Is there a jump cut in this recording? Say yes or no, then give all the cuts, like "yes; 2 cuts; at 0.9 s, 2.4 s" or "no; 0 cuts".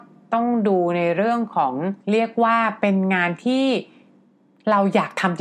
yes; 1 cut; at 2.0 s